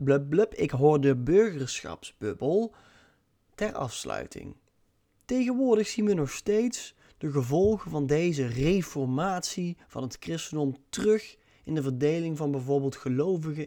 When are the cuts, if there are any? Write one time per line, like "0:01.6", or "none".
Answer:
none